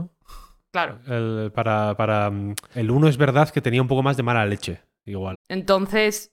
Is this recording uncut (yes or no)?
no